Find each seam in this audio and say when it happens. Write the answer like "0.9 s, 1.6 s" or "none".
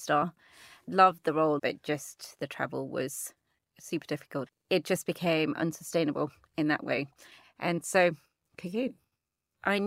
1.6 s, 7.4 s